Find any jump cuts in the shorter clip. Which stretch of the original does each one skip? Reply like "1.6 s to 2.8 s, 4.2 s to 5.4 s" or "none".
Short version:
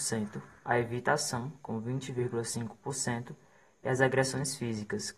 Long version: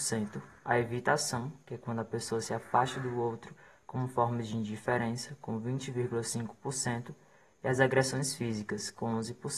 1.6 s to 5.4 s